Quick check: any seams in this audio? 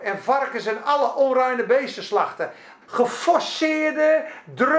yes; 1 cut; at 2.8 s

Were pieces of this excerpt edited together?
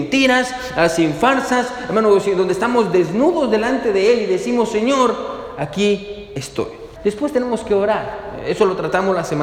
yes; 1 cut; at 6.9 s

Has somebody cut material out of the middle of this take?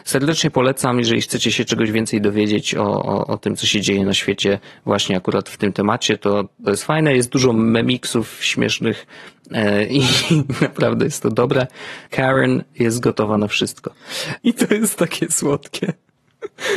yes; 2 cuts; at 12.1 s, 14.4 s

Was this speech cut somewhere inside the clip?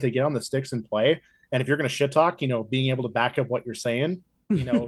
no; 0 cuts

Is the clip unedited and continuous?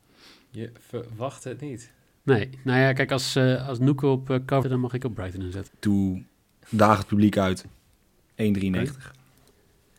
no; 3 cuts; at 4.6 s, 5.7 s, 8.3 s

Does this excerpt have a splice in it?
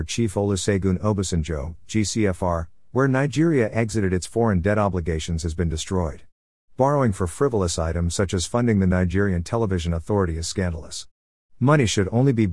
no; 0 cuts

